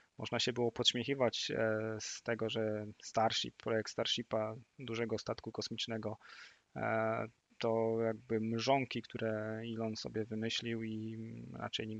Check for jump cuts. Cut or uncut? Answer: uncut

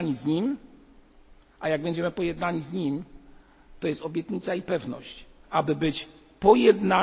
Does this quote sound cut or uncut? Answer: cut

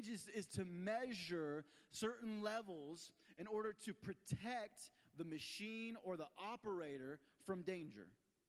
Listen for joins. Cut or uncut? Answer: uncut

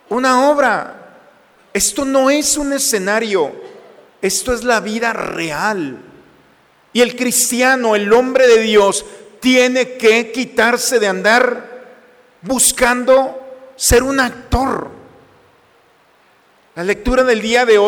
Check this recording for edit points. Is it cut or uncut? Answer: uncut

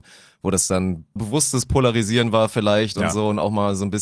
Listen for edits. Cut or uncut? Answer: cut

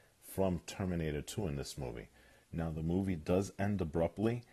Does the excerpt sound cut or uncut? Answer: cut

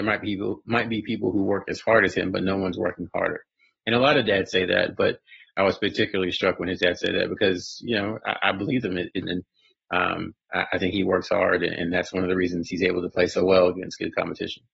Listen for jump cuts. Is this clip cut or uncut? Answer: cut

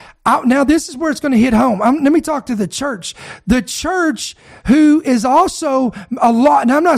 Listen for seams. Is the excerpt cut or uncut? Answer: uncut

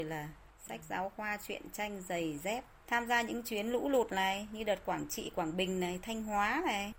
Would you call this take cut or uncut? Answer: uncut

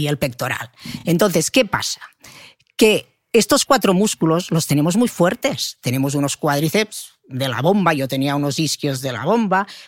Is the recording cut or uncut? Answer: uncut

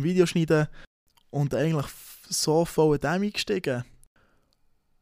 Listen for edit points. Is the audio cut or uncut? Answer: uncut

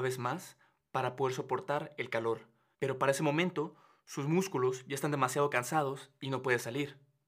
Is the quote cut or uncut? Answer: cut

